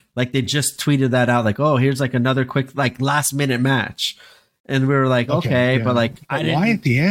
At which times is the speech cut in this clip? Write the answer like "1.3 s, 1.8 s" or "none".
none